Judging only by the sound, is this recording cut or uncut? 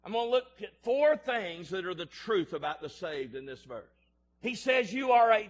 cut